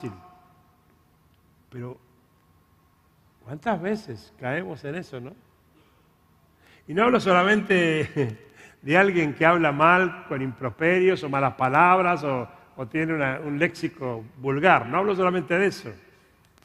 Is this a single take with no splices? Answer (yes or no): yes